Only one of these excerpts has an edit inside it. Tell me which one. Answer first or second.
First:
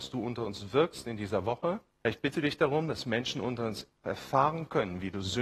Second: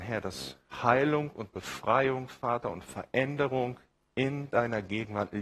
first